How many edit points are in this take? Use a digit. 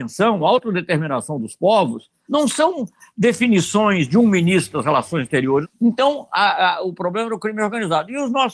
2